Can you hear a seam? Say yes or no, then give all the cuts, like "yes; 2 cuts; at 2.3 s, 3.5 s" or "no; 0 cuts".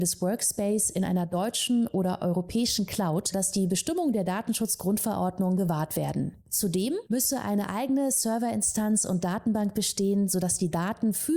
yes; 1 cut; at 3.3 s